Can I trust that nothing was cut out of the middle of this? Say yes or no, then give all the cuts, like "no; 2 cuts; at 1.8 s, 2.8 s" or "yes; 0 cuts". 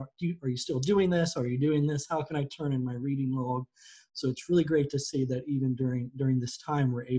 yes; 0 cuts